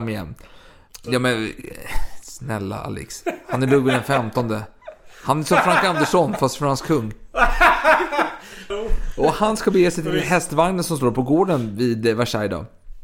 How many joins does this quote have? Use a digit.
2